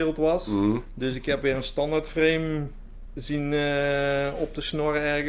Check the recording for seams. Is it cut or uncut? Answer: uncut